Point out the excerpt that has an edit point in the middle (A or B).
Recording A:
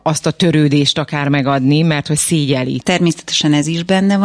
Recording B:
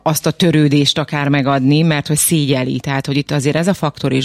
A